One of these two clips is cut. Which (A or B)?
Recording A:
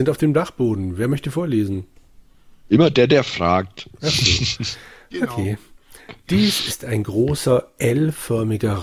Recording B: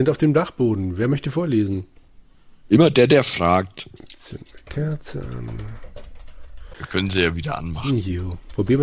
B